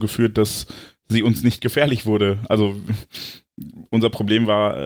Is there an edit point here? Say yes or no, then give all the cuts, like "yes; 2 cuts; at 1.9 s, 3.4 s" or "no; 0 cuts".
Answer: no; 0 cuts